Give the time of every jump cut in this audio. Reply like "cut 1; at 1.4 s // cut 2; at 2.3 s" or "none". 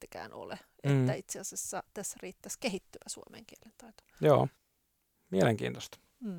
none